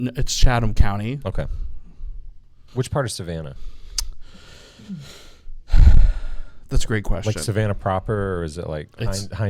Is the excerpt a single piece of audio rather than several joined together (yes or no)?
no